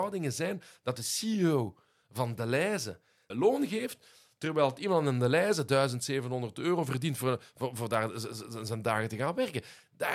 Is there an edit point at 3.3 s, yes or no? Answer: yes